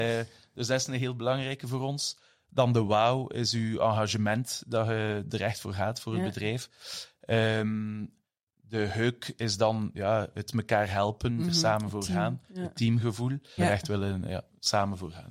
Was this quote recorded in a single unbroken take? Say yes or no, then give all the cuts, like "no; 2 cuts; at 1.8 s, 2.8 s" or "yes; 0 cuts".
no; 2 cuts; at 11.3 s, 13.6 s